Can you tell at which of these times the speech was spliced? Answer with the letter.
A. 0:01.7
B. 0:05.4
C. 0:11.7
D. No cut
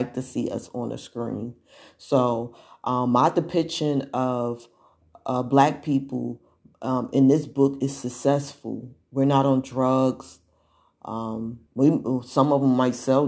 C